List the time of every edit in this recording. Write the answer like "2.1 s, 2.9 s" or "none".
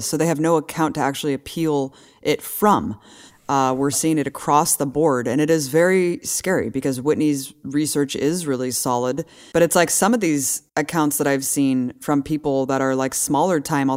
9.5 s, 10.7 s